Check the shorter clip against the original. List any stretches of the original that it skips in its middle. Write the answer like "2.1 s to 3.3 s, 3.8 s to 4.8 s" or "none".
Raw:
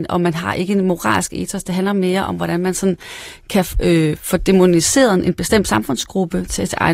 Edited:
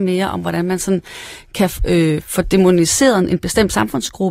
none